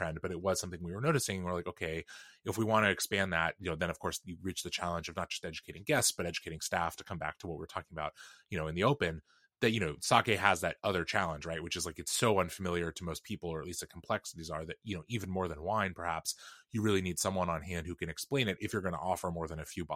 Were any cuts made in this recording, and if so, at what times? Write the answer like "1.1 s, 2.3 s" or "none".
none